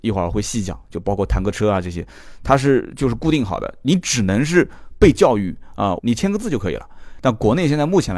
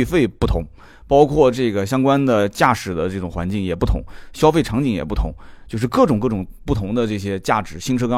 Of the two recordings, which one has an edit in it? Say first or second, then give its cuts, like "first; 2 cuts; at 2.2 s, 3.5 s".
first; 2 cuts; at 6.0 s, 7.2 s